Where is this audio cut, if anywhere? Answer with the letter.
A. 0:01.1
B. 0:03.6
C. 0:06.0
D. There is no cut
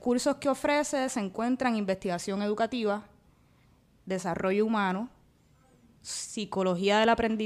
D